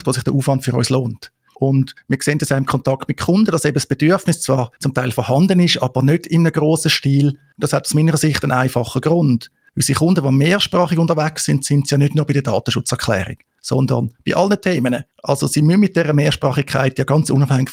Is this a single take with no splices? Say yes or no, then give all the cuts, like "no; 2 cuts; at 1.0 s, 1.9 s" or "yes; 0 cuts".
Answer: no; 1 cut; at 1.5 s